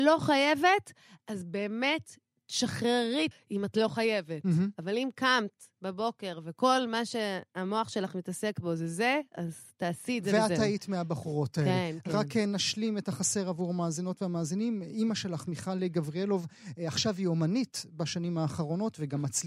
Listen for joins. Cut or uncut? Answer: cut